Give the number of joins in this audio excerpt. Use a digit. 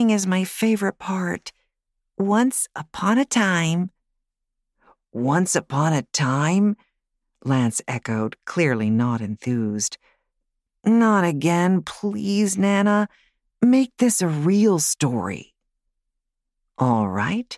0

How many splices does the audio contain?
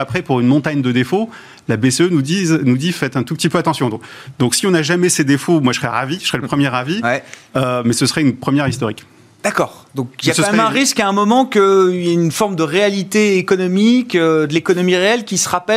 0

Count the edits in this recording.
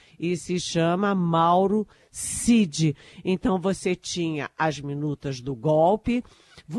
0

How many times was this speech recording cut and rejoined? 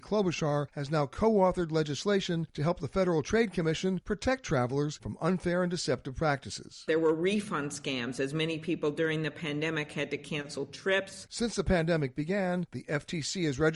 1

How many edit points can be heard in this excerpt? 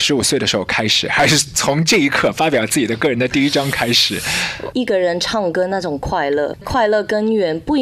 1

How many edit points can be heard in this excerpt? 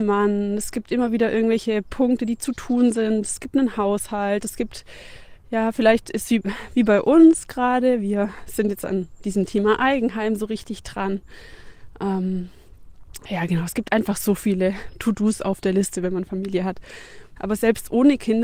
1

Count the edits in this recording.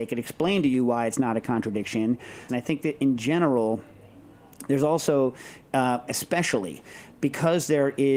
2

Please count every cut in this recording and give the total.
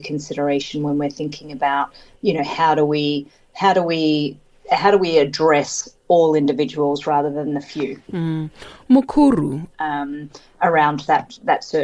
2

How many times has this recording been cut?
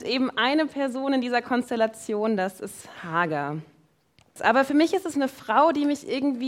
1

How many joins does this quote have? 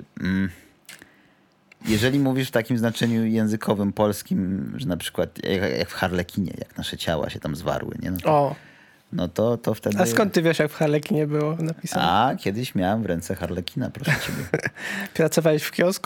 0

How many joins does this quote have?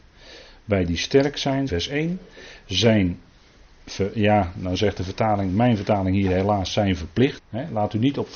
2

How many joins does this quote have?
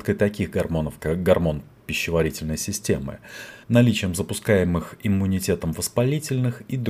2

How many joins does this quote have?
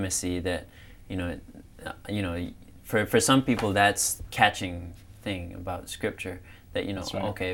1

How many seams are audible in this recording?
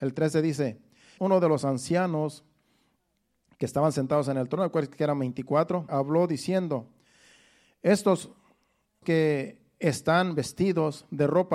3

